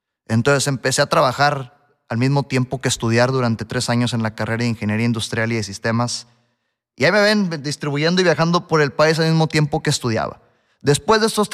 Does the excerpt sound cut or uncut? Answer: uncut